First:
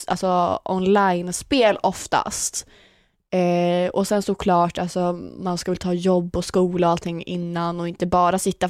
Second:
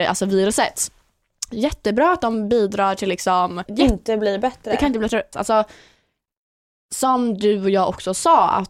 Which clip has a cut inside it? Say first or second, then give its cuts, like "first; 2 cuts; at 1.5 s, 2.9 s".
second; 2 cuts; at 3.7 s, 5.3 s